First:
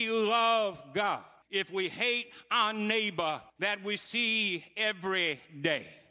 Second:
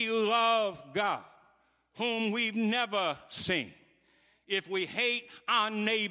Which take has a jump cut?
first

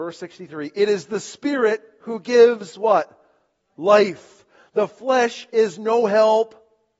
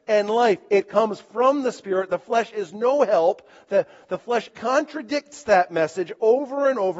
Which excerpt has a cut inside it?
second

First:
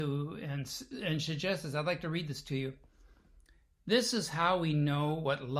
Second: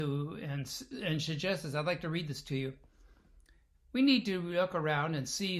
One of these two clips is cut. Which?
second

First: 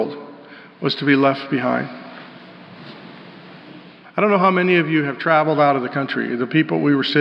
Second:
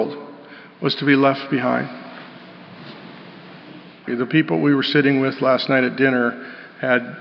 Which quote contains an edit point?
second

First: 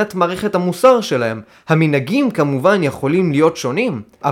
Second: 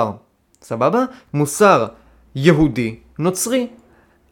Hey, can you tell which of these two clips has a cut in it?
second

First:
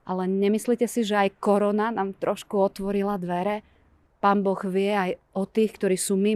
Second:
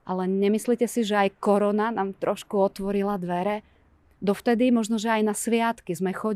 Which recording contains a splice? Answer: first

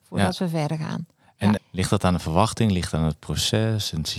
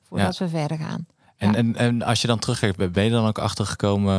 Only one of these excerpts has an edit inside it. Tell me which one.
first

